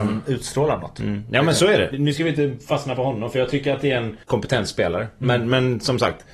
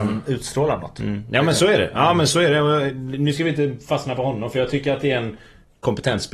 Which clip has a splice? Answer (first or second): first